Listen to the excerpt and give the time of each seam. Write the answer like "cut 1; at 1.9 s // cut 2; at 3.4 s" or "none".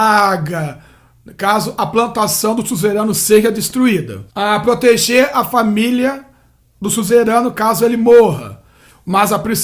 cut 1; at 4.3 s